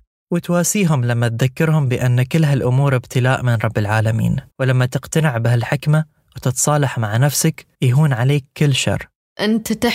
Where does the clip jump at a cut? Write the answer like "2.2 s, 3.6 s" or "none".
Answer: 4.5 s, 7.7 s